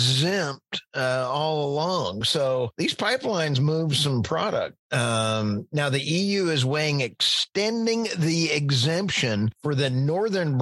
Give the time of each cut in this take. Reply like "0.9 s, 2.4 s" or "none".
none